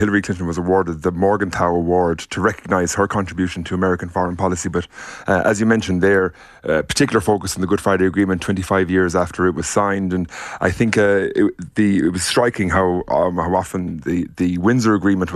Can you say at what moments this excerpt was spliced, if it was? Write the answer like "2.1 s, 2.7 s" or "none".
none